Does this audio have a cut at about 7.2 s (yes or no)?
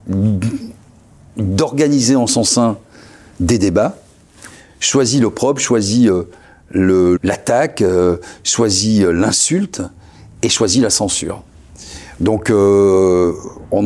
yes